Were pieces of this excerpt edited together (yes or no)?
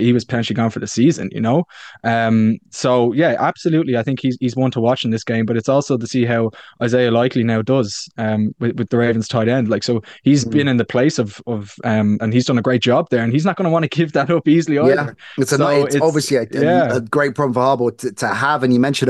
yes